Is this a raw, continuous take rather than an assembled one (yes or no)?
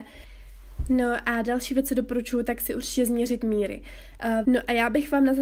no